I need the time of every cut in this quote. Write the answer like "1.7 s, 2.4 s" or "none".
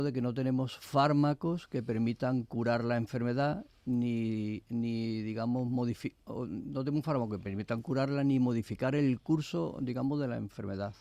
none